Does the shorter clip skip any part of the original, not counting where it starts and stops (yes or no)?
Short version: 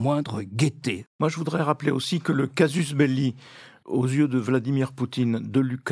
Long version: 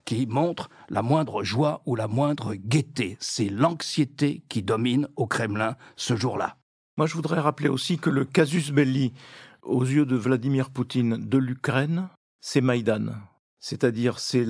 yes